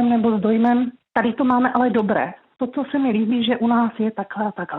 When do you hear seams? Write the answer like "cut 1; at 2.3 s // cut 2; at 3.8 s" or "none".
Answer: cut 1; at 1.0 s